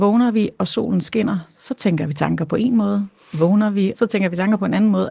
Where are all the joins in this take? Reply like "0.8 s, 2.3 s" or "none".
3.9 s